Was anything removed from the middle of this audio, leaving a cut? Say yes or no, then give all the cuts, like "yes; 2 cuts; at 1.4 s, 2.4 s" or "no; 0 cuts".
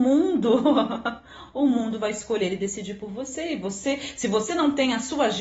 no; 0 cuts